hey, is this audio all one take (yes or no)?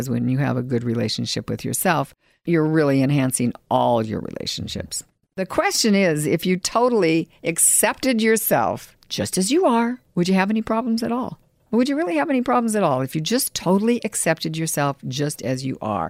yes